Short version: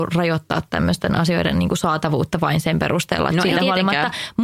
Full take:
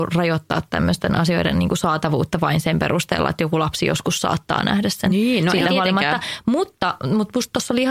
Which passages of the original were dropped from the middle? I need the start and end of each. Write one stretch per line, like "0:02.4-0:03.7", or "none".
0:03.3-0:05.4